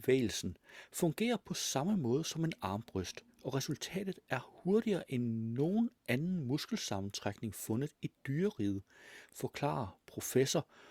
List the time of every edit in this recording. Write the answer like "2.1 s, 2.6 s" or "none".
none